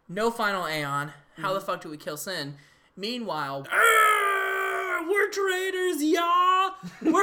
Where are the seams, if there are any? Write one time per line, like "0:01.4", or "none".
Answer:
0:03.6